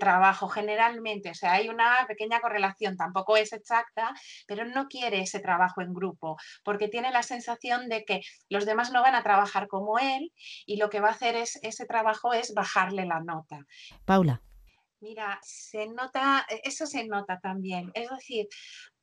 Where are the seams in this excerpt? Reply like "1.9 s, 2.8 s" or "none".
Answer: 13.9 s, 15.4 s